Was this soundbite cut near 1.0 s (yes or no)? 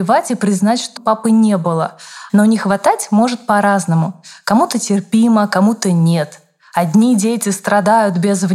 yes